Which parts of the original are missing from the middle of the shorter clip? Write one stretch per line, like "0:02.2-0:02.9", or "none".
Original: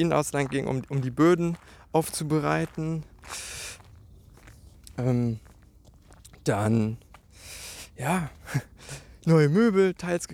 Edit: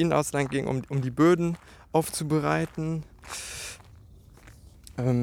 none